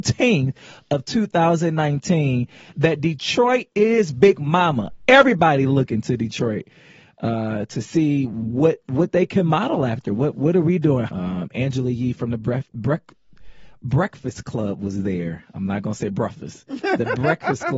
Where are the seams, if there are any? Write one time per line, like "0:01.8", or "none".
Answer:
0:11.1